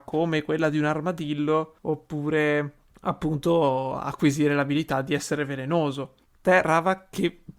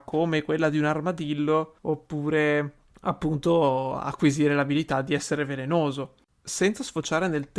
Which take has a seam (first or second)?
second